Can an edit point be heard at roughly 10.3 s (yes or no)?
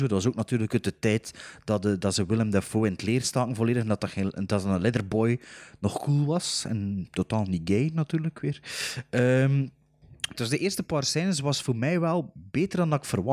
yes